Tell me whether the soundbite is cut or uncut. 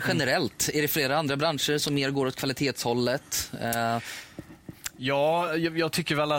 uncut